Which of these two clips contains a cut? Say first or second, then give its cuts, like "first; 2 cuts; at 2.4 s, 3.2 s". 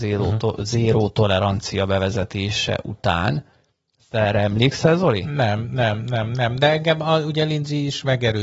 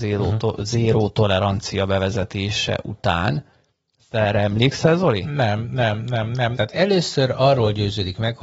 second; 1 cut; at 6.5 s